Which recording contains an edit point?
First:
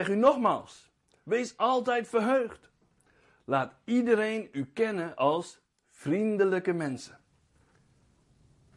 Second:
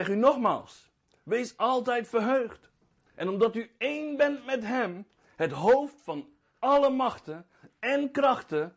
second; 1 cut; at 3.1 s

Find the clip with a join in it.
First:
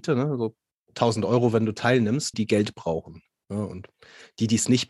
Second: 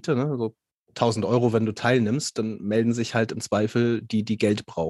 first; 1 cut; at 2.3 s

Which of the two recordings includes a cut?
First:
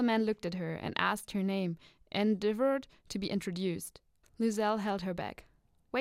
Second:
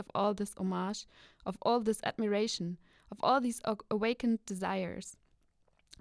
first; 1 cut; at 4.2 s

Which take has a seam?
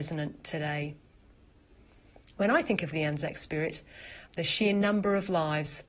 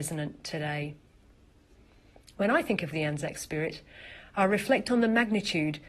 first; 1 cut; at 4.3 s

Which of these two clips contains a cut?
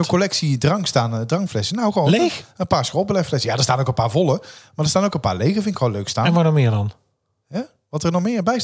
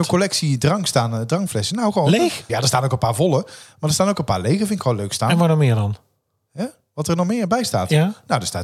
second; 1 cut; at 2.5 s

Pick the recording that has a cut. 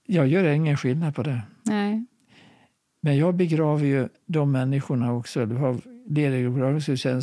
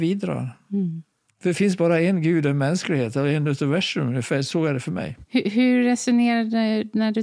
second; 1 cut; at 1.3 s

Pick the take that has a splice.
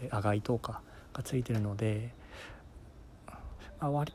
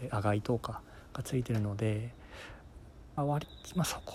second; 1 cut; at 3.2 s

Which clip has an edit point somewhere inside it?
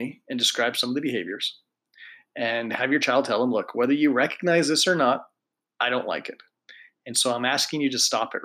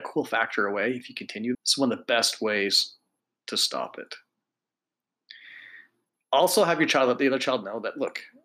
second; 1 cut; at 1.5 s

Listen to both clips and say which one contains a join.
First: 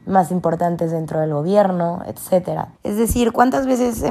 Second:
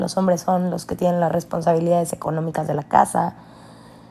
first; 1 cut; at 2.7 s

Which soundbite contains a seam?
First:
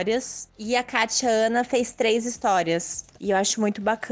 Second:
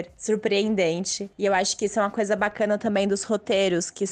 first; 1 cut; at 3.2 s

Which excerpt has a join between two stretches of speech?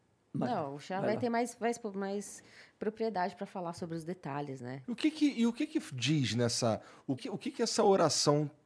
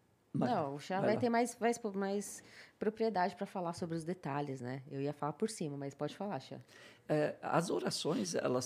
first; 2 cuts; at 4.8 s, 7.2 s

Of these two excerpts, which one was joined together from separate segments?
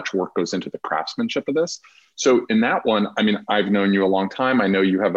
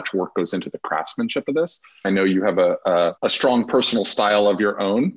second; 2 cuts; at 2.0 s, 3.2 s

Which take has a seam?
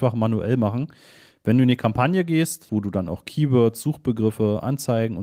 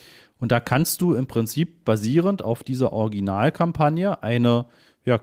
first; 1 cut; at 2.7 s

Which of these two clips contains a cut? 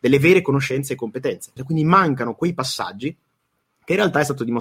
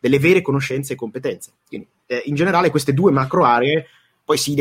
first; 1 cut; at 1.6 s

